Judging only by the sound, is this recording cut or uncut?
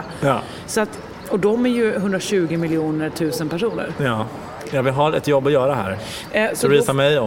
cut